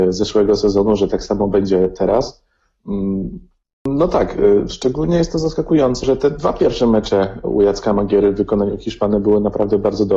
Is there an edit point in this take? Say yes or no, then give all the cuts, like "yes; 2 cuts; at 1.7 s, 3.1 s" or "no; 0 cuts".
yes; 2 cuts; at 3.8 s, 6.0 s